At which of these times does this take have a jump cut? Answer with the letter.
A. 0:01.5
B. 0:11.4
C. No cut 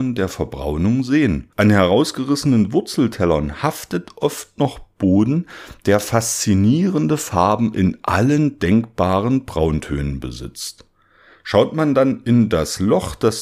A